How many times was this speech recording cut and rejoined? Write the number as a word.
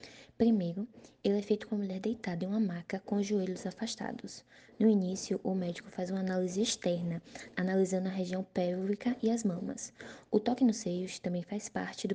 zero